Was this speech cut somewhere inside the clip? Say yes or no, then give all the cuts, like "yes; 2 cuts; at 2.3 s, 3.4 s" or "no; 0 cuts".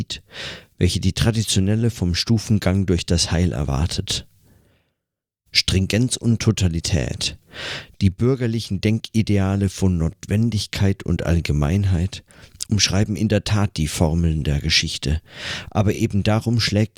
no; 0 cuts